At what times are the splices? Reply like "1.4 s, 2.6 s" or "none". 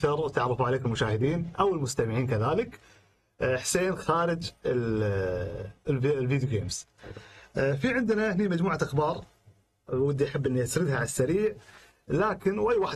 none